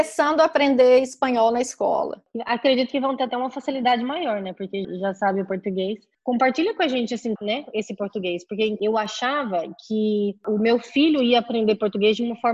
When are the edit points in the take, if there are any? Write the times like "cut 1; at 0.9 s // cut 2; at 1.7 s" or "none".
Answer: cut 1; at 4.8 s // cut 2; at 7.4 s